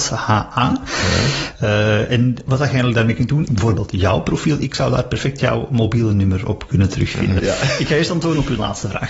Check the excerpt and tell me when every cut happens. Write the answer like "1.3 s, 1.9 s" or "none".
3.5 s, 7.4 s